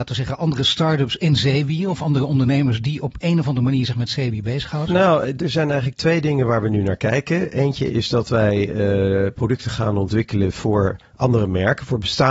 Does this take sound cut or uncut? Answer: cut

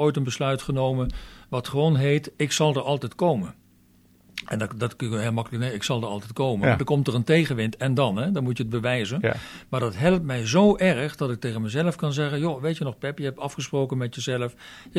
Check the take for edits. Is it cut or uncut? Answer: uncut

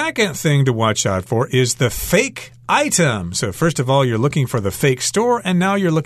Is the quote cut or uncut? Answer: uncut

